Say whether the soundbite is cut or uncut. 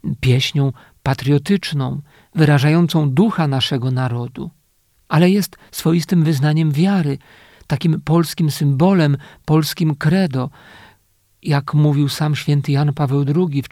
uncut